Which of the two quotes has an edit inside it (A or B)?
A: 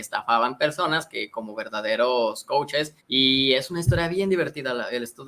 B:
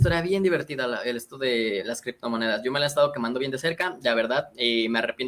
A